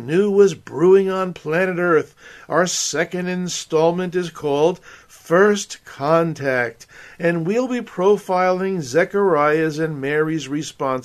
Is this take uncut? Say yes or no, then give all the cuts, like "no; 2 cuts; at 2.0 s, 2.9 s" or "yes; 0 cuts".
yes; 0 cuts